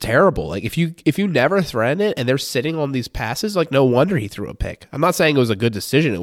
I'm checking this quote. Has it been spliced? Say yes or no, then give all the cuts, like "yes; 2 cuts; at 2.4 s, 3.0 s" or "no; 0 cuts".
no; 0 cuts